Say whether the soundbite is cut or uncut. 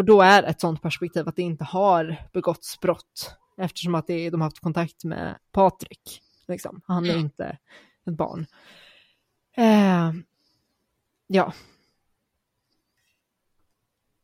uncut